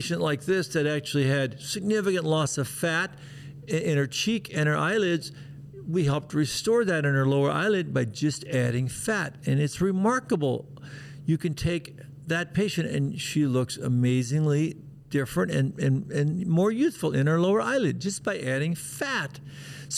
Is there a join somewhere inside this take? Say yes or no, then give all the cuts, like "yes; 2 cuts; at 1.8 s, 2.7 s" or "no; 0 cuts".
no; 0 cuts